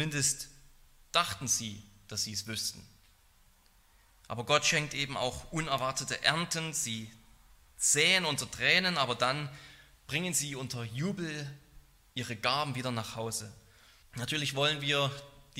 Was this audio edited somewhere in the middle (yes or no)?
yes